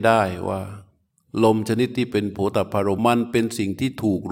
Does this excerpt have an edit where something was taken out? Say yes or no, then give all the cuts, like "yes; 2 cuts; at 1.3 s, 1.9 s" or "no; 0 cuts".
yes; 1 cut; at 3.0 s